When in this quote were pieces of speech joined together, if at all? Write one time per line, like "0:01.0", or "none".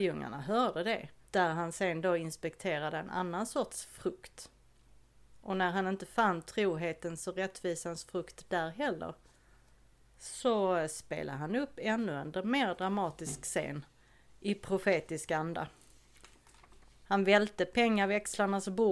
0:01.2
0:17.0